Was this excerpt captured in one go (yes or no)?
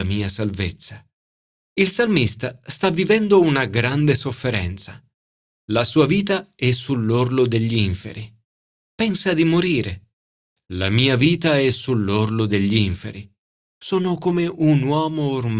no